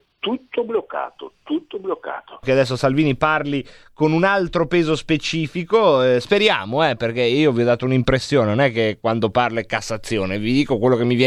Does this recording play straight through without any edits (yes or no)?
no